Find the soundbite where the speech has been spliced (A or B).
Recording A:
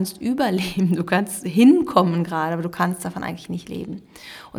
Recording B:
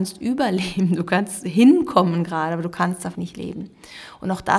B